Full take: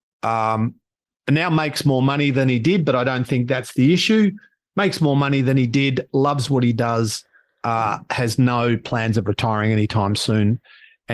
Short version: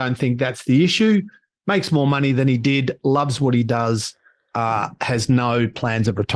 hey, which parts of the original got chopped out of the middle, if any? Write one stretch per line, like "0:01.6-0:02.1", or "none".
none